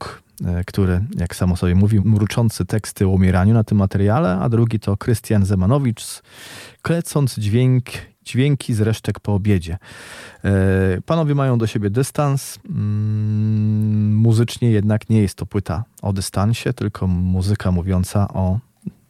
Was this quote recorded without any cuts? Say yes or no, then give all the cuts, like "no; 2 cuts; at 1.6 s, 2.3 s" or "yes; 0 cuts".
no; 1 cut; at 2.0 s